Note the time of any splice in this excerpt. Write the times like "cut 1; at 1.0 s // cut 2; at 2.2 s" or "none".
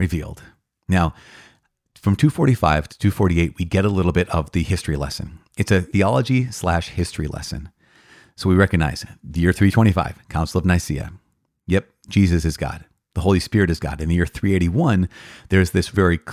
none